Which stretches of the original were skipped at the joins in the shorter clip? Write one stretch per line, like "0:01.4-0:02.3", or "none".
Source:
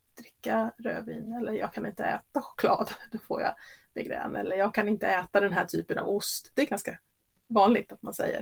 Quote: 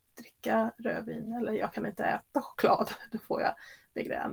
none